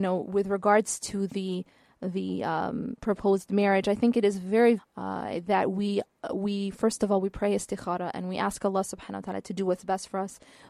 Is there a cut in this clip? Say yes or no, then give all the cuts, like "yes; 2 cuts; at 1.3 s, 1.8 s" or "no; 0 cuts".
yes; 1 cut; at 4.8 s